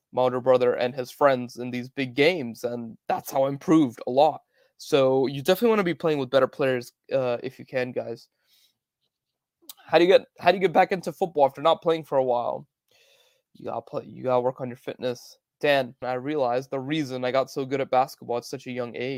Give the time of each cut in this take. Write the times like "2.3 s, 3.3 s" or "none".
16.0 s